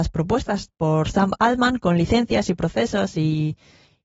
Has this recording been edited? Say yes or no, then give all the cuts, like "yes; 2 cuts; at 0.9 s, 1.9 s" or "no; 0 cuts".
no; 0 cuts